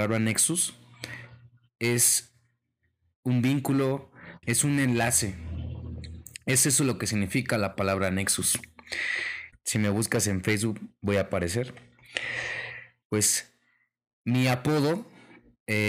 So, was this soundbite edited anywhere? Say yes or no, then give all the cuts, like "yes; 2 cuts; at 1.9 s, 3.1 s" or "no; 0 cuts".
yes; 3 cuts; at 4.4 s, 9.5 s, 13.0 s